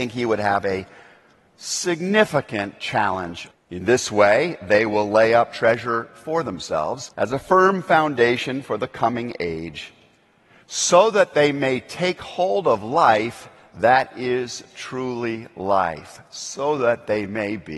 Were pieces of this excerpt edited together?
yes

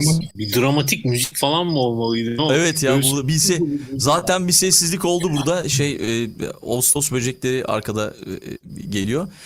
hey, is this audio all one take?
yes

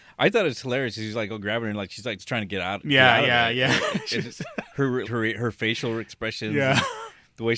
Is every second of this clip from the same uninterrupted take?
no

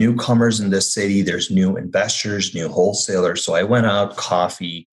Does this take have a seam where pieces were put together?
no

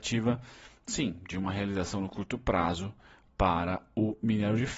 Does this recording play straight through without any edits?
yes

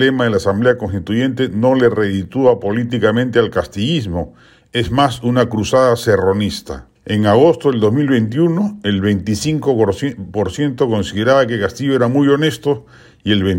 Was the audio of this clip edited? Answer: yes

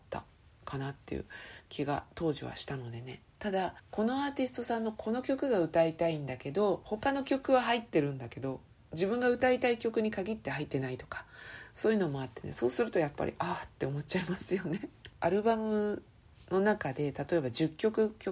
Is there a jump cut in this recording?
no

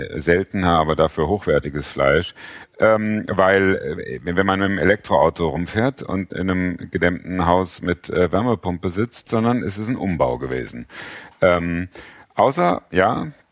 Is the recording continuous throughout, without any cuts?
no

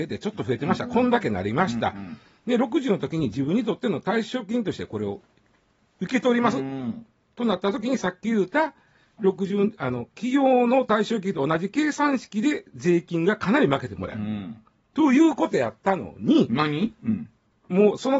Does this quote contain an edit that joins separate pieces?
no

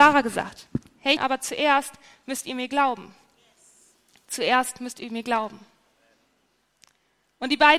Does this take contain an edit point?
yes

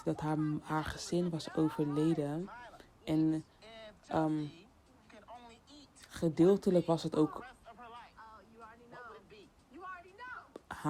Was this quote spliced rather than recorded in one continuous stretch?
no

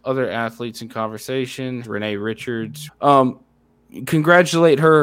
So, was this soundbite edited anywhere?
yes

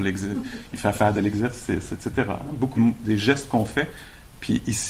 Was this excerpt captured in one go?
no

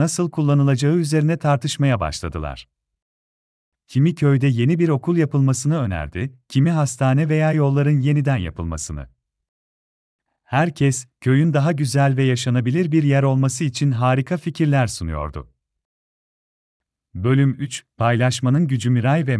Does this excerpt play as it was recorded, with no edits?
yes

